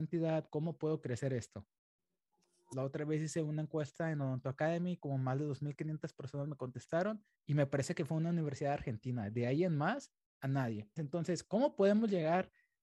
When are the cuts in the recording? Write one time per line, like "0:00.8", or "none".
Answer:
0:02.7
0:07.3
0:11.0